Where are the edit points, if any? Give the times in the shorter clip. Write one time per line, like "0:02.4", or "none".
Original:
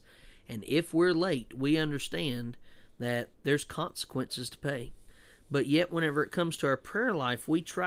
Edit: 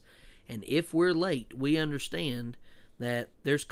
none

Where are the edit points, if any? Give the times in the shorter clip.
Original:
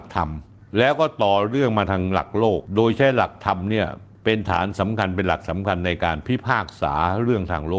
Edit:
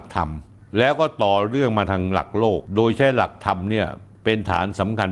none

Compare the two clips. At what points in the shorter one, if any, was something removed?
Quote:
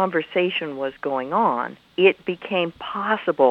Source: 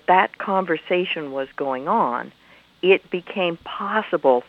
0:01.8

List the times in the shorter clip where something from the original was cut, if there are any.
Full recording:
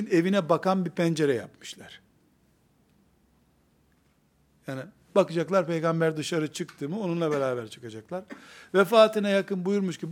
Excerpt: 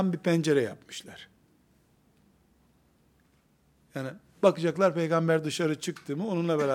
none

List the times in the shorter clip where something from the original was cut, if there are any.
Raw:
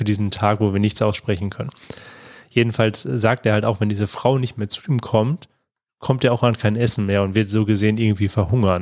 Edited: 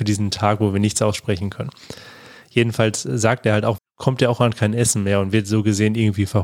0:03.8

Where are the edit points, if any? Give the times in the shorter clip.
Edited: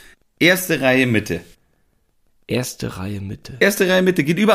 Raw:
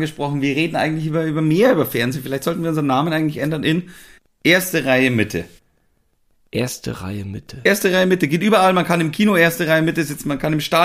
none

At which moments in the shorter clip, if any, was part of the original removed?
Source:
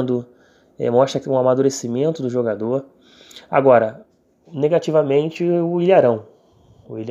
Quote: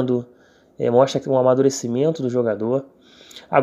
none

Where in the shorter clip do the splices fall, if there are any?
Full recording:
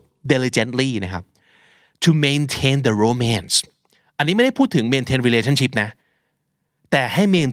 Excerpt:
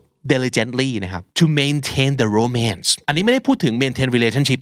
0:01.3
0:03.0

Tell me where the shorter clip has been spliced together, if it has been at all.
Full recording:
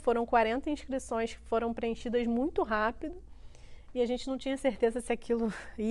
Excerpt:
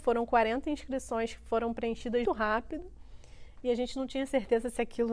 0:02.2

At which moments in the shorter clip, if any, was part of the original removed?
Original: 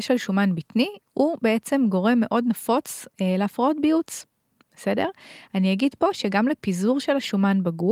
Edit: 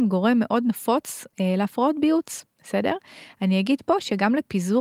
0:02.5

